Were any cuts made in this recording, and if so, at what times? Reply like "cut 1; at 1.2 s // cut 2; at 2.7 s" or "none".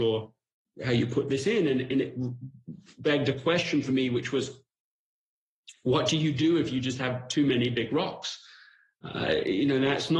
none